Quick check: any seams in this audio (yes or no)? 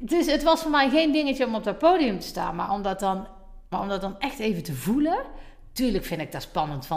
yes